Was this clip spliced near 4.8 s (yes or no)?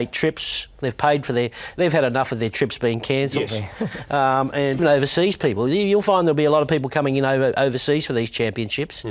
yes